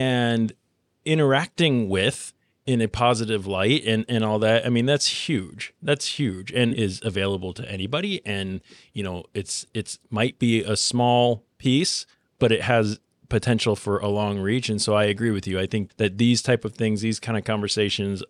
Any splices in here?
yes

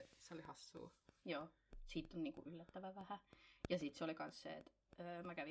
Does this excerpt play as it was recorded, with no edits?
yes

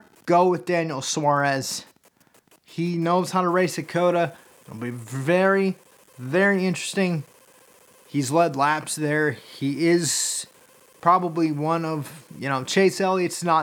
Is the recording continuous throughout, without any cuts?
yes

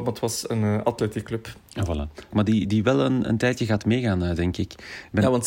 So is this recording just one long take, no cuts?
no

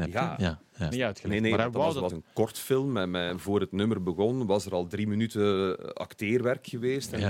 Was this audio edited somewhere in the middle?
yes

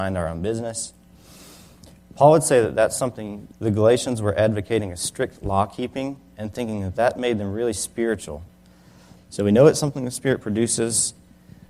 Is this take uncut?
no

